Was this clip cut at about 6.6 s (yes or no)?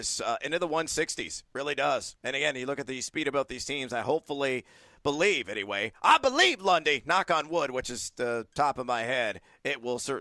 no